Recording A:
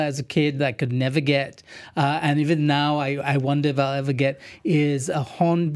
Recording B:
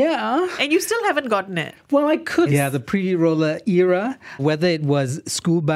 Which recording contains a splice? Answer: B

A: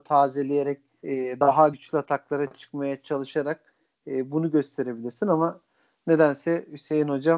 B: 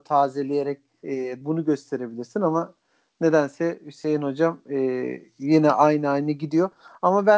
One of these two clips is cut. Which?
B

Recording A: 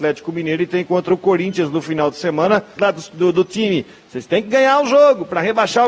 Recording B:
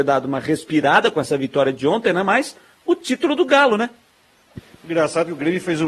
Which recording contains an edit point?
A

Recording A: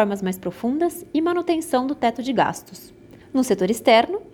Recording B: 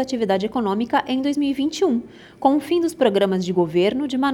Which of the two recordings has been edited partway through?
A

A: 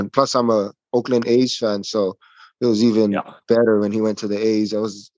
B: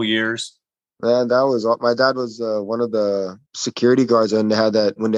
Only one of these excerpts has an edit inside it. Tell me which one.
B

